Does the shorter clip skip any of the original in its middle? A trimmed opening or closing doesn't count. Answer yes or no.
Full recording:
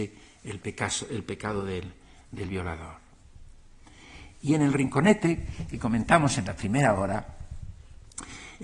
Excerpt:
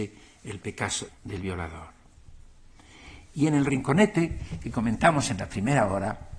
yes